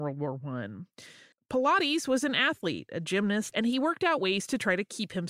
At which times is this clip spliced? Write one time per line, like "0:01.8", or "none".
0:01.3
0:03.5